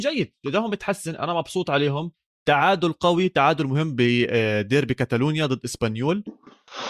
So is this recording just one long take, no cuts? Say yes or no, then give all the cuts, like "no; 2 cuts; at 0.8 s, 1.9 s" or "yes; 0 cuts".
yes; 0 cuts